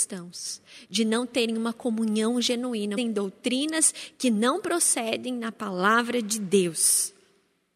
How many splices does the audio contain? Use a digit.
1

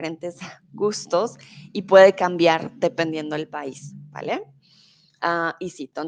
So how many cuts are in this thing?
0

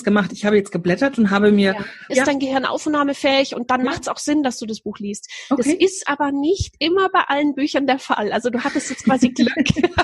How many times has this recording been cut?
1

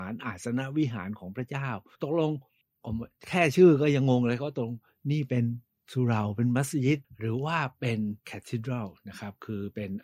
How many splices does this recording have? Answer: 1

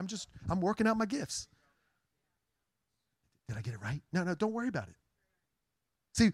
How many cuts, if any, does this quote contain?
0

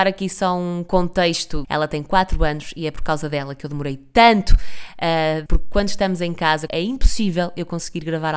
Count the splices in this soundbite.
3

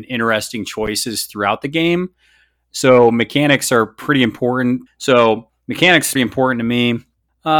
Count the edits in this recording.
2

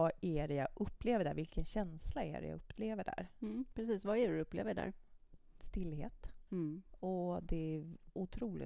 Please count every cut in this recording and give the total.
1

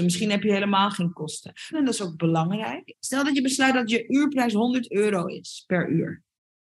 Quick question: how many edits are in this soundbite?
2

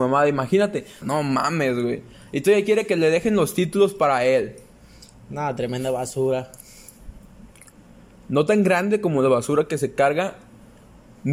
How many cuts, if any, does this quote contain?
1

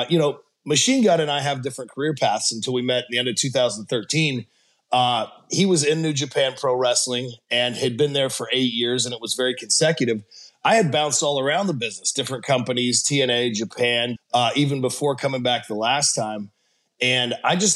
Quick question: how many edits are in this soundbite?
1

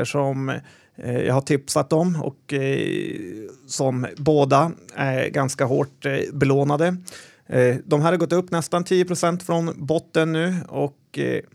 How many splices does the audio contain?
0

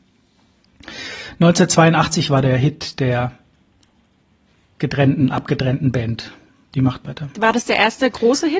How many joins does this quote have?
1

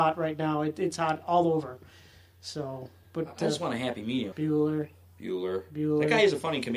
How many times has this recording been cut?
1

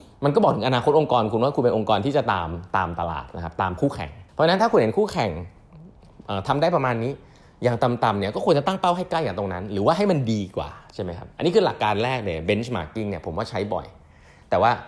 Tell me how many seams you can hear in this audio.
1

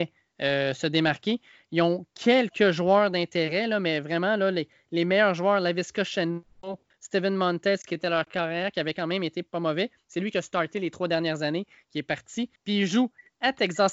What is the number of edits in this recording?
1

